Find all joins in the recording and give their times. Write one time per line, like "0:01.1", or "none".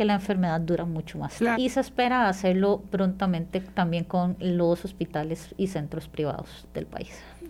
0:01.5